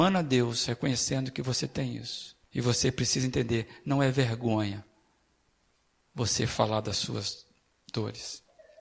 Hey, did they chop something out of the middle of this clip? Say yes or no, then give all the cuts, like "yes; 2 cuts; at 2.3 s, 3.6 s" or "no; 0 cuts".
yes; 1 cut; at 2.4 s